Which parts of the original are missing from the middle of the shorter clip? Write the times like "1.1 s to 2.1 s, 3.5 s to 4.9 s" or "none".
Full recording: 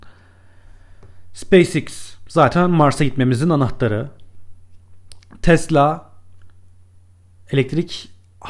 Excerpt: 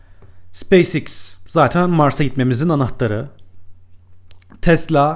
none